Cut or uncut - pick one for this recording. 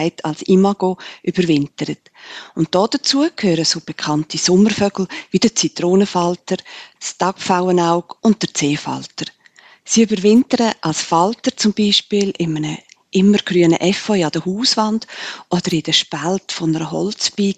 cut